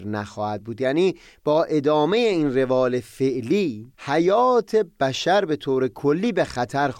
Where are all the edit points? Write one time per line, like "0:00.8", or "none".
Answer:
0:03.9